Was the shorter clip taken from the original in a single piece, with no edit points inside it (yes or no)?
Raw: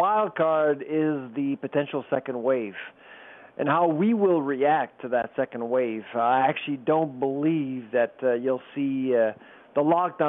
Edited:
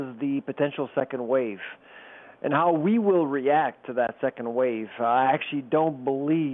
yes